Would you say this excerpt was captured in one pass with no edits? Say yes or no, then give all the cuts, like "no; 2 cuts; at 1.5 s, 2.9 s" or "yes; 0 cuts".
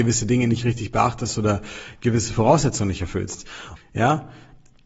no; 1 cut; at 3.8 s